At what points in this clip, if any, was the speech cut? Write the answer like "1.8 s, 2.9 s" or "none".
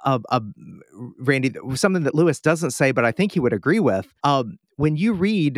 4.2 s